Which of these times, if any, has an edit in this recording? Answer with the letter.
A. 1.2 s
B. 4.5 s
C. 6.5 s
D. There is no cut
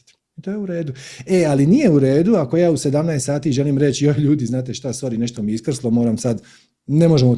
D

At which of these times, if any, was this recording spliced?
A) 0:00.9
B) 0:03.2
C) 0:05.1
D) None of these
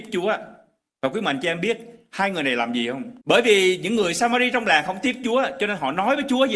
B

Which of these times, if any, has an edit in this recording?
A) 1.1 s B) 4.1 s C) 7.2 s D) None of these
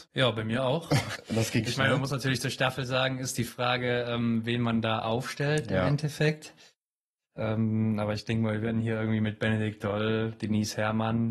A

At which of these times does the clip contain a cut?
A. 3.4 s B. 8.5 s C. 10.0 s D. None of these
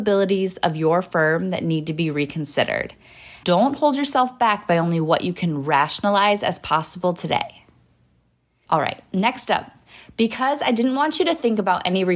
A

